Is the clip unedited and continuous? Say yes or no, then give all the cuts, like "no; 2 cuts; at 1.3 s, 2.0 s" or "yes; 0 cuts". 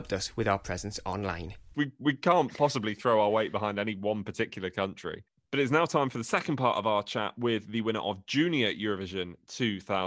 no; 1 cut; at 1.7 s